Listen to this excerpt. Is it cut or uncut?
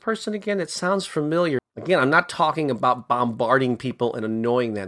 cut